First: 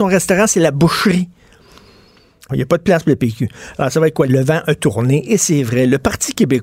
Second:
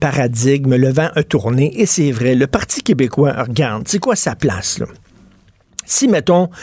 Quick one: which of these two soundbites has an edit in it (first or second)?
first